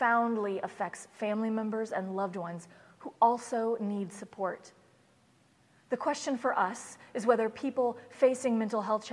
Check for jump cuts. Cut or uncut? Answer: uncut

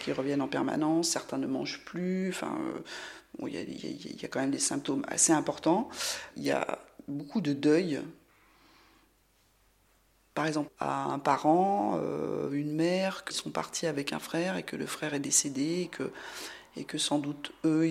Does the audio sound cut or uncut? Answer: cut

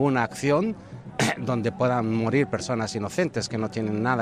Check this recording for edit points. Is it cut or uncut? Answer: uncut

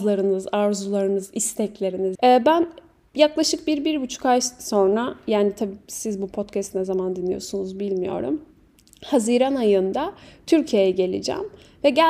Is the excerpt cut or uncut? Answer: cut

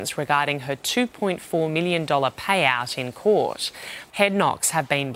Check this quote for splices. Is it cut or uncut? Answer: cut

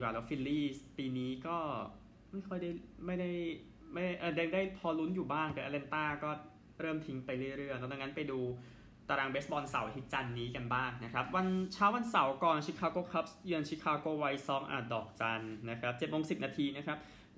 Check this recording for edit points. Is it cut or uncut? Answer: uncut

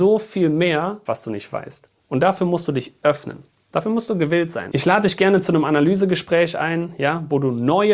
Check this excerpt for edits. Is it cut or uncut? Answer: cut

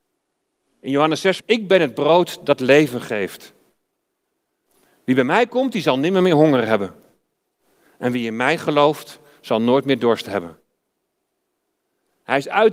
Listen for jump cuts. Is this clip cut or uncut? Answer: cut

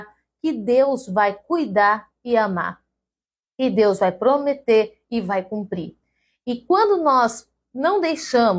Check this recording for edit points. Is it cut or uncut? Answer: uncut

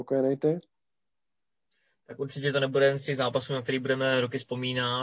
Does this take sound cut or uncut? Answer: uncut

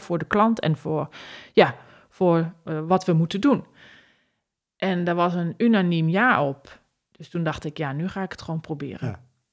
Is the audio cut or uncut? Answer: uncut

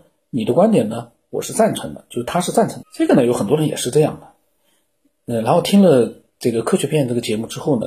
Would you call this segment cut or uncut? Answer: cut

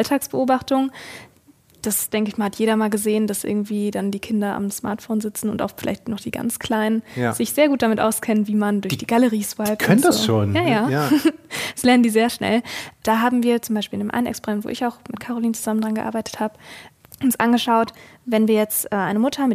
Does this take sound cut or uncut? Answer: uncut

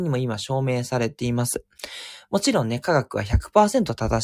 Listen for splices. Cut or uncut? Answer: uncut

